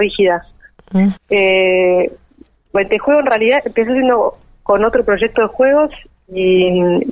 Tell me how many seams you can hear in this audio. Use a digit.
2